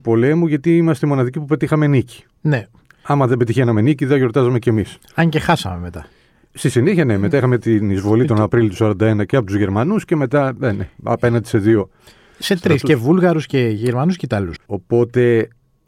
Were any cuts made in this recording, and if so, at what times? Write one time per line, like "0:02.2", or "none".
0:14.6

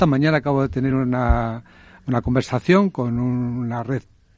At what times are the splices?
none

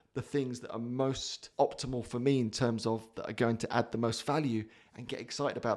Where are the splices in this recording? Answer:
0:01.5

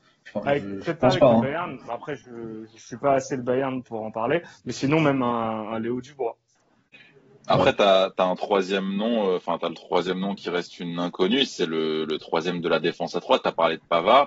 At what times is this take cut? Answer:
0:03.8

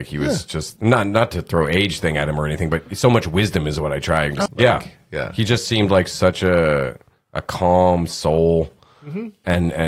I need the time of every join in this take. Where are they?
0:04.5

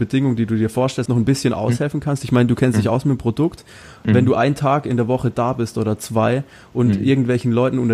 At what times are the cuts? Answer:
0:01.1

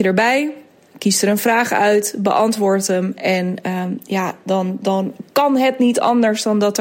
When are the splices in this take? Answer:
none

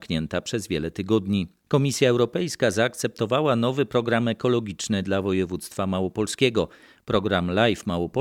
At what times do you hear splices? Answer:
0:01.6

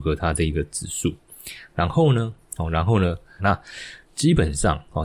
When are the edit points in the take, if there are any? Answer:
0:03.4

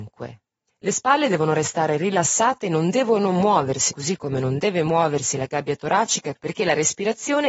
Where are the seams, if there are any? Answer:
0:03.9
0:06.3

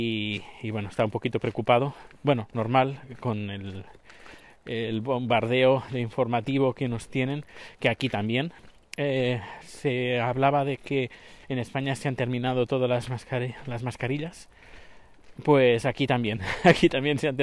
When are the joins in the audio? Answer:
none

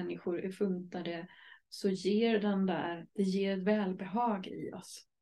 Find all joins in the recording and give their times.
0:03.1

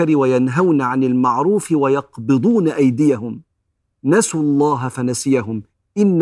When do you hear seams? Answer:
none

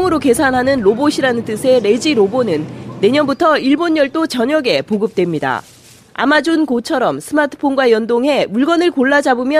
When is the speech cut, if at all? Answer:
none

